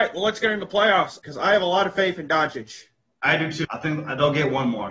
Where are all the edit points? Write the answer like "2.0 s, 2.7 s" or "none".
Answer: 1.2 s, 3.6 s